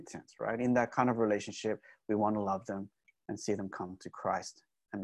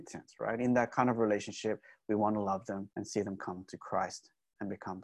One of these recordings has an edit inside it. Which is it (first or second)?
second